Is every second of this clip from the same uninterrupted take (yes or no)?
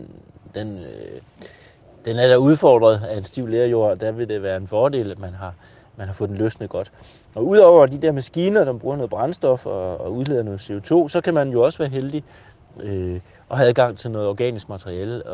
yes